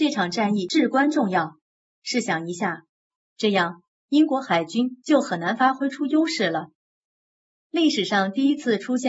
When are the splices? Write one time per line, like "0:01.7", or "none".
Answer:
0:03.2